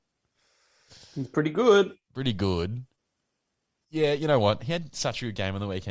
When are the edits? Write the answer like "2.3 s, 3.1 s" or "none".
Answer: none